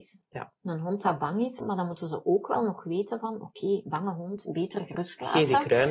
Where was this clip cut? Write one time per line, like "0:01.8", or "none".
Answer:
0:01.6